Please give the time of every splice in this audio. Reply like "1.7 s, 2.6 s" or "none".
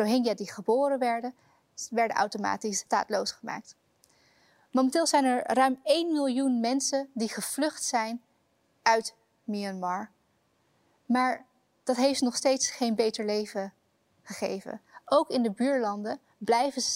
none